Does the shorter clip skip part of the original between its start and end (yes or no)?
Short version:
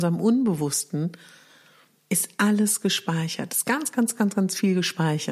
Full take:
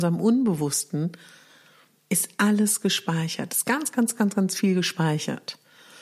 no